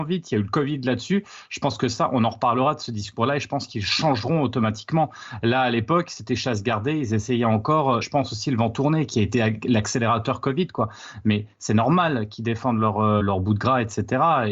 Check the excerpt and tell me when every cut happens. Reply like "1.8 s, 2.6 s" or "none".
8.0 s, 13.2 s